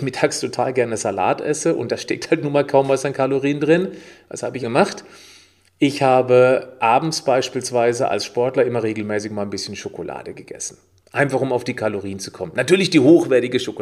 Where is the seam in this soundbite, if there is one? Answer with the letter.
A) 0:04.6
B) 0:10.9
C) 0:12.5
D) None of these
A